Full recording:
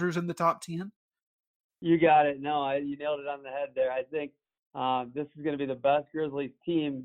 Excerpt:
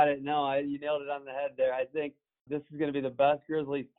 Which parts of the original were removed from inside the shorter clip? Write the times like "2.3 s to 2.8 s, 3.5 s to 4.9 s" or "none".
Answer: 4.6 s to 5.1 s